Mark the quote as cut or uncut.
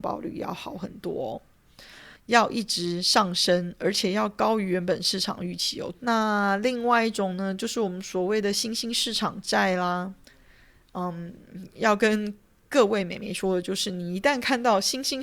cut